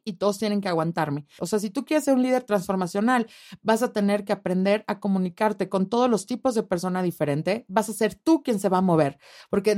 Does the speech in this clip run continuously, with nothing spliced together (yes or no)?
no